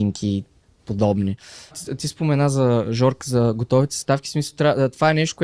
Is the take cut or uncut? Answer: uncut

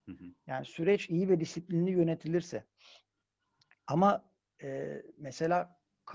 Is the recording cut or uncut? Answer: uncut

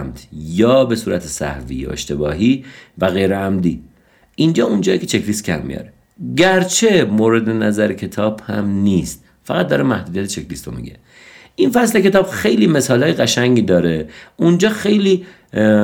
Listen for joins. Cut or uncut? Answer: uncut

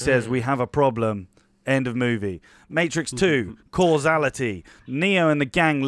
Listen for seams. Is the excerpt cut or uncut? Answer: uncut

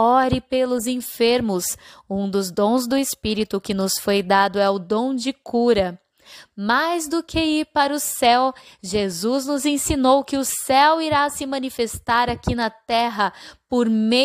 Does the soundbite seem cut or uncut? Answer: uncut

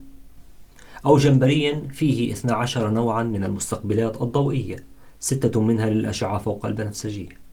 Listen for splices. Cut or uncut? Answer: cut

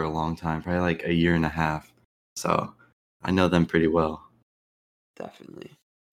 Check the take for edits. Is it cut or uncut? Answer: uncut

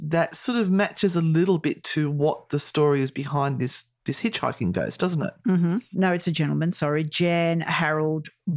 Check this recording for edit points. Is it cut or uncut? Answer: cut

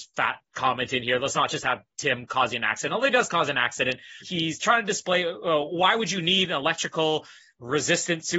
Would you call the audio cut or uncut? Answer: cut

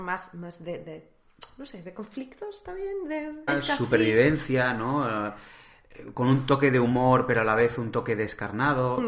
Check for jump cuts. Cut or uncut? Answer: cut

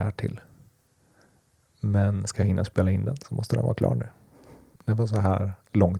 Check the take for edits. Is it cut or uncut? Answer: cut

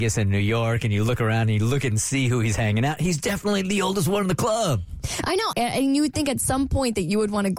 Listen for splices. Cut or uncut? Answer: cut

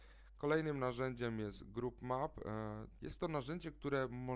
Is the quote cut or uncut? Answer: cut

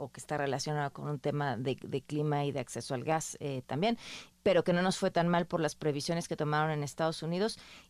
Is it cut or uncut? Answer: uncut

